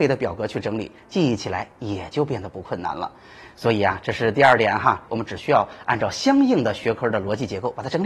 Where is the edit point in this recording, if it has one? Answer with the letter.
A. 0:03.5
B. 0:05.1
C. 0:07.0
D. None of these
B